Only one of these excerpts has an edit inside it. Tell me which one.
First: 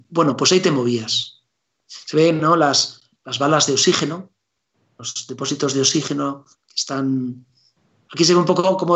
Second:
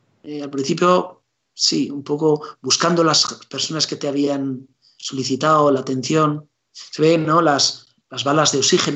first; 1 cut; at 1.8 s

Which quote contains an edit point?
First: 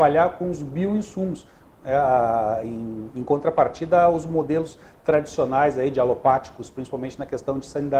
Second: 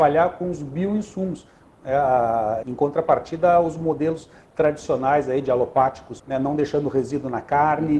second; 2 cuts; at 2.6 s, 6.2 s

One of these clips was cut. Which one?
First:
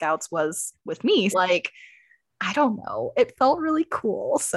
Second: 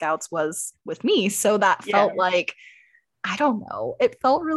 first; 1 cut; at 1.3 s

